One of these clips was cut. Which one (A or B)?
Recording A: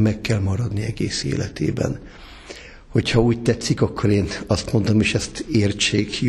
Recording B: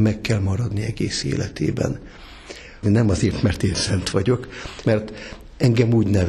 B